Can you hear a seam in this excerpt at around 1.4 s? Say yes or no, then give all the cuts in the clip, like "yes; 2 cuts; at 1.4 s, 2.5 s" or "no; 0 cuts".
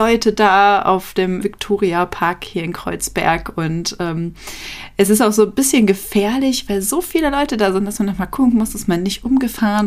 yes; 1 cut; at 1.4 s